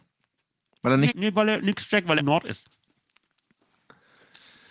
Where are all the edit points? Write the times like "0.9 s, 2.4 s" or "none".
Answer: 1.1 s, 2.2 s